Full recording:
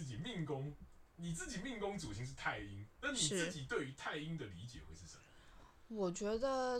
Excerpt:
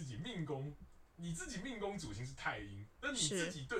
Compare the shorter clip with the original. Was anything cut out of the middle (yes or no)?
no